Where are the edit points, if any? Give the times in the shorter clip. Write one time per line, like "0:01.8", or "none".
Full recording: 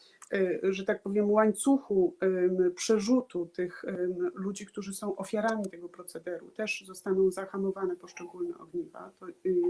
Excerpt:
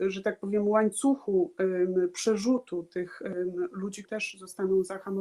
0:04.0

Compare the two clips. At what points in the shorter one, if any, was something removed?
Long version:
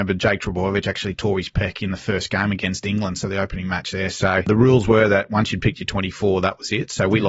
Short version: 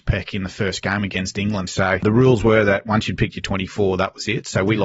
0:01.7

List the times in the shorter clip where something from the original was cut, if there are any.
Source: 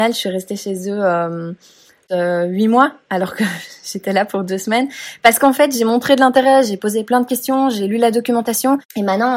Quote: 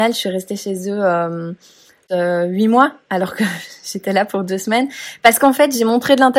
none

